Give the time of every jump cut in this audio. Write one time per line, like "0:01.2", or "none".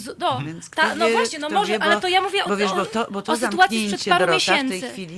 none